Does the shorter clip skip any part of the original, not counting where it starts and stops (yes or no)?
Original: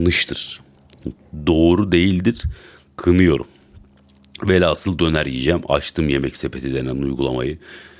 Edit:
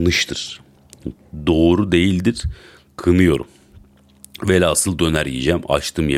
no